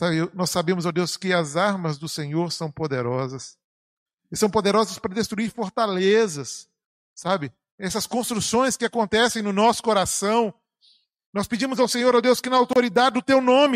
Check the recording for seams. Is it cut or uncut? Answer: uncut